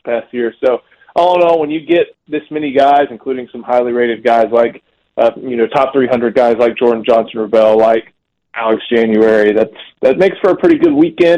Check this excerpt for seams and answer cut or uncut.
uncut